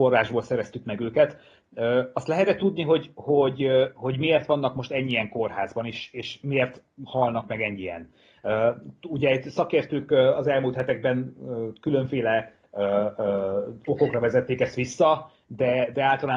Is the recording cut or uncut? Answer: uncut